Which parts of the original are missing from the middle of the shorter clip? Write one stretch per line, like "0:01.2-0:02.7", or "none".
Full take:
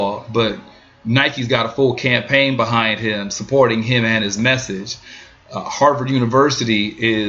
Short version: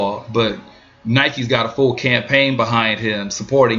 none